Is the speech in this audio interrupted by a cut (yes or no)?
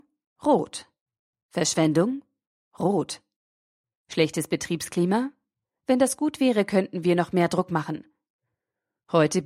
no